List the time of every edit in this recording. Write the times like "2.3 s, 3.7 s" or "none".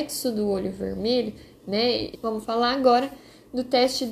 2.1 s